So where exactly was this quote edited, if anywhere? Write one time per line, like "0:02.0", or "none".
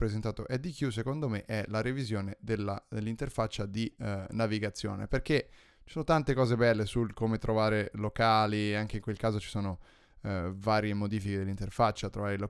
none